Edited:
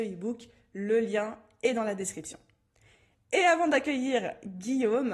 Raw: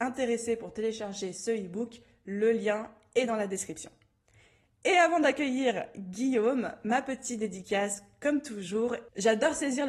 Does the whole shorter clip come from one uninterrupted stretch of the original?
yes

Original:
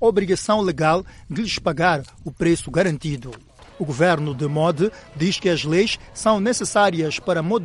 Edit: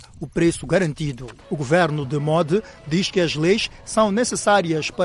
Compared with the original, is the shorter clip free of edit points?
no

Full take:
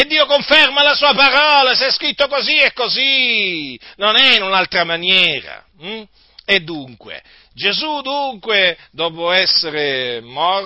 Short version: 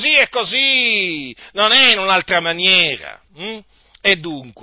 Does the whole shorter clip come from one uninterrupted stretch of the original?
yes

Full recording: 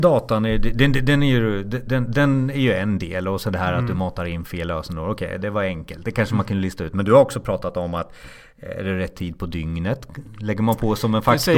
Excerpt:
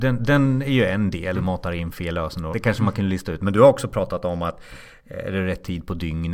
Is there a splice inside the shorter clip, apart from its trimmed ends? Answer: yes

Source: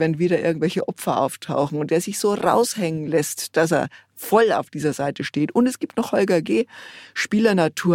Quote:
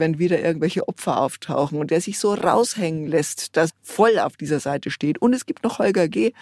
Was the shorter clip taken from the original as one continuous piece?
no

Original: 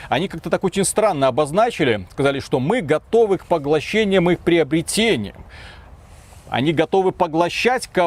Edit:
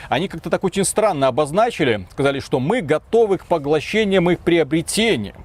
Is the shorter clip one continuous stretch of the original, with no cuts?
yes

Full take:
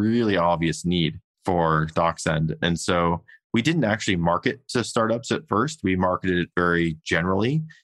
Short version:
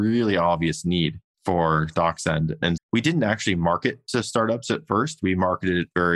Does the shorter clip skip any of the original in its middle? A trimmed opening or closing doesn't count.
yes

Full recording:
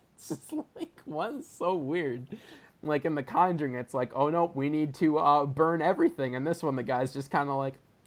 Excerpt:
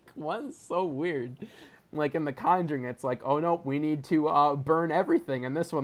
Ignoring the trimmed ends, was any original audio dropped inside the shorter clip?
no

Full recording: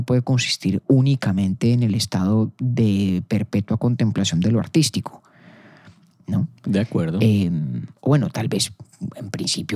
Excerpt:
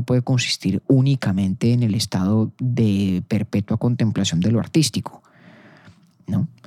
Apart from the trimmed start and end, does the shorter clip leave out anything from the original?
no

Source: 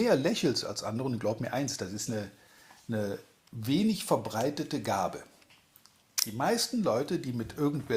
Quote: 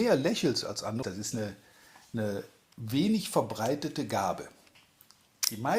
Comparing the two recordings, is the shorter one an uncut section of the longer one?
no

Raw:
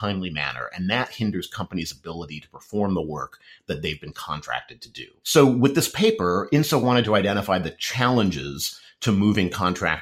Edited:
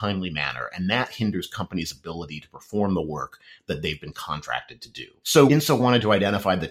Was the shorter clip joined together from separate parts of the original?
yes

